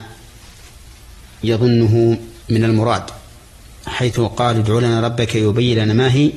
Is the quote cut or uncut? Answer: cut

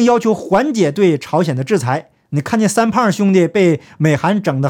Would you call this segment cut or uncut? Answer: uncut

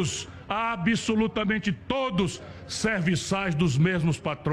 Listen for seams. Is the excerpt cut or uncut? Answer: uncut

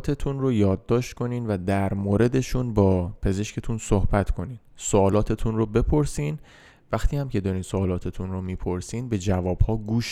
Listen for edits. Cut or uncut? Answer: uncut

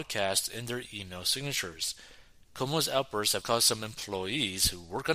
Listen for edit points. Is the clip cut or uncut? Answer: cut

